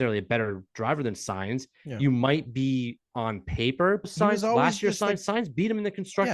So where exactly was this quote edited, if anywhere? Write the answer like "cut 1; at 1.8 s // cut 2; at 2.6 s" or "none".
cut 1; at 4.0 s